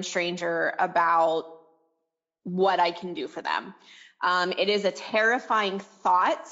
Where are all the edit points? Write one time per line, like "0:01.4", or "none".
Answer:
none